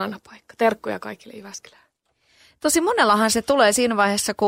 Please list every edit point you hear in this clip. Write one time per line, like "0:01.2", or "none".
none